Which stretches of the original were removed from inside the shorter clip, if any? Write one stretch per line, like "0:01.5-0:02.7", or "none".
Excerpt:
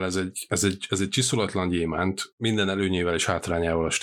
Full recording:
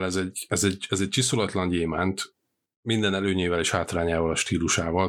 0:02.3-0:02.8